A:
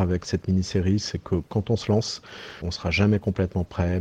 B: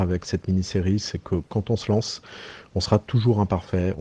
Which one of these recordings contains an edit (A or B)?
A